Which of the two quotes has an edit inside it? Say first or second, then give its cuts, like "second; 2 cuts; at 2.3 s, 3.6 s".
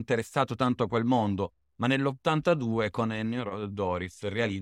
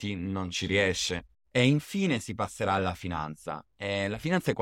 second; 1 cut; at 1.3 s